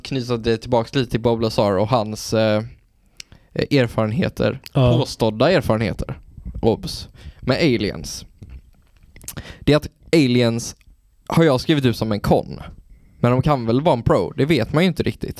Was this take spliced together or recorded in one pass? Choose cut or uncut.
uncut